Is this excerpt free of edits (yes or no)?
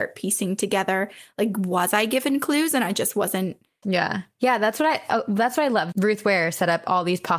no